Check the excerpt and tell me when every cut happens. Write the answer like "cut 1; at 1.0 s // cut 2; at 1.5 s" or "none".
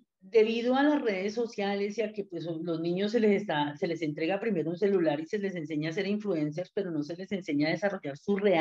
none